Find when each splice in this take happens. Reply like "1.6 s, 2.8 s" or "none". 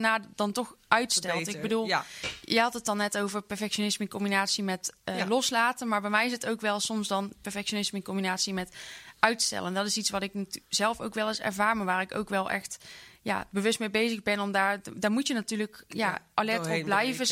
none